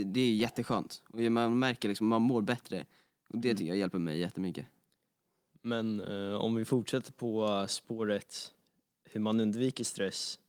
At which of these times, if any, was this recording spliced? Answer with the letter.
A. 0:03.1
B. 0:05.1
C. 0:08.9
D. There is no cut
A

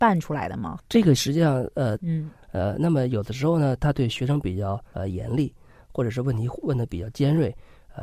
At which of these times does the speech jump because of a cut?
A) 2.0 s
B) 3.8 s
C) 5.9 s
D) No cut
A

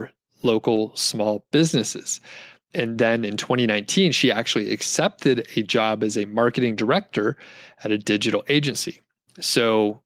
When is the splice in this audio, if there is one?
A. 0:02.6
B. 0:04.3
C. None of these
C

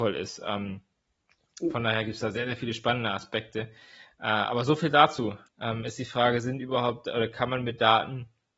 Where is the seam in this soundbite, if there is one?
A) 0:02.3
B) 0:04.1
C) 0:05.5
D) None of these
C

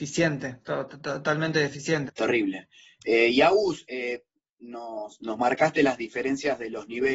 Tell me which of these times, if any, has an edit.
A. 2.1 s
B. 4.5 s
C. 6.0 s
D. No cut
A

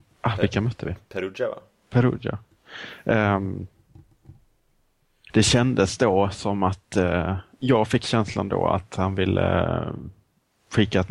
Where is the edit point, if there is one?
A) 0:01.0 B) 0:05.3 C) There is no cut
B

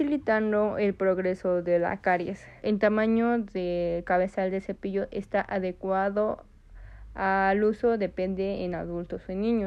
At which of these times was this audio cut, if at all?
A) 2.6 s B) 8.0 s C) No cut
A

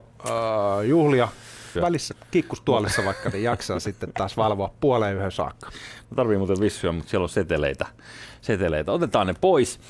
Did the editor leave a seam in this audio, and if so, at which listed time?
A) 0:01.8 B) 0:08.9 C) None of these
A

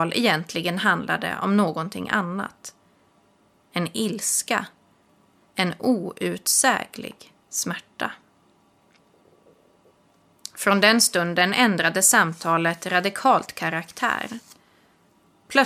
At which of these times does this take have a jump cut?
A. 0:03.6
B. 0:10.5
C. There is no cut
A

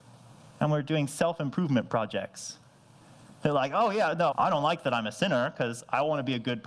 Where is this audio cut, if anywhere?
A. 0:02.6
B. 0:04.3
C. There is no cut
B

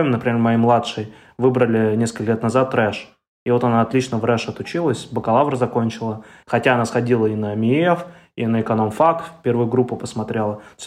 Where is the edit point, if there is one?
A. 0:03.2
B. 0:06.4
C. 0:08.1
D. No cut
B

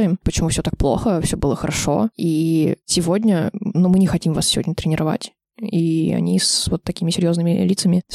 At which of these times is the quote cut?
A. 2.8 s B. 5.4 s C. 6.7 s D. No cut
A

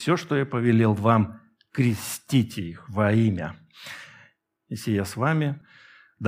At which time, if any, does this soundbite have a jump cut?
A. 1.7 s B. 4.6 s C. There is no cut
B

